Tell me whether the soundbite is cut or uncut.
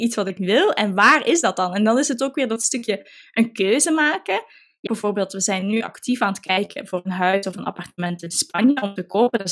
cut